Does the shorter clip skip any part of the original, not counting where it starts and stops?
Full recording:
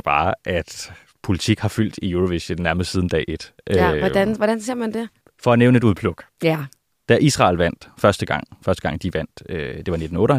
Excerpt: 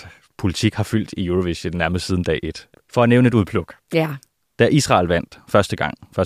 yes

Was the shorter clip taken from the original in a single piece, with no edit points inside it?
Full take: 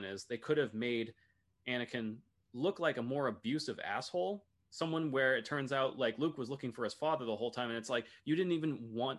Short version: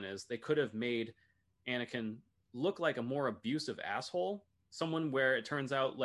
yes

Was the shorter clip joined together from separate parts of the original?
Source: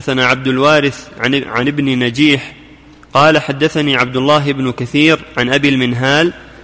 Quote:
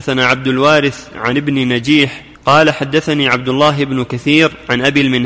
yes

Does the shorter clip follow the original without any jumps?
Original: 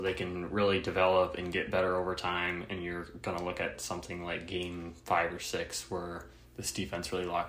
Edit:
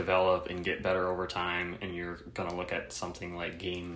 yes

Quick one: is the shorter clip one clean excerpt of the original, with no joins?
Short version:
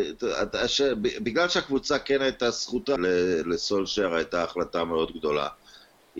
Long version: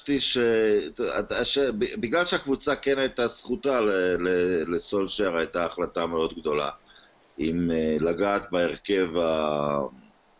no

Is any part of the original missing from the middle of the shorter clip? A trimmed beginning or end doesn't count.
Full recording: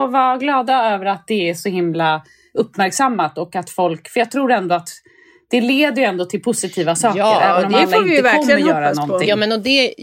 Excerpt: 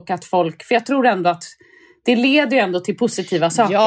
no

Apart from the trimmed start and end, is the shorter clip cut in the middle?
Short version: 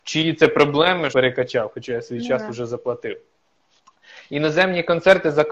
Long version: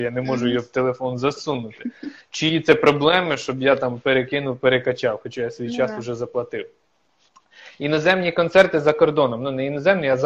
yes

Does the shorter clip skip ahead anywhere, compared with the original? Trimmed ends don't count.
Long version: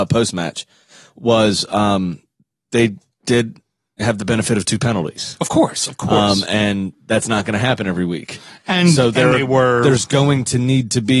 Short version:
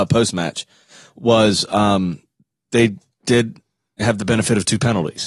no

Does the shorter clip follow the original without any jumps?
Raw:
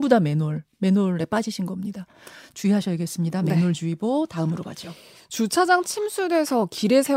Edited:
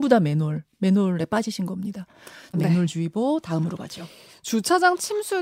no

